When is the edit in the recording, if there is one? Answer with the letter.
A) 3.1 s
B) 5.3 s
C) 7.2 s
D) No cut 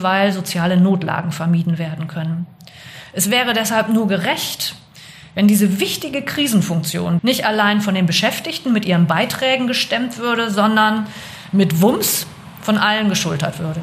C